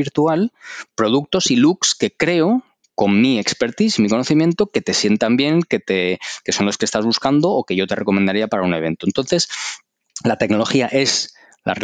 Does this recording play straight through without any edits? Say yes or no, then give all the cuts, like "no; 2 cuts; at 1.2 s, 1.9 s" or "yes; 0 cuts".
yes; 0 cuts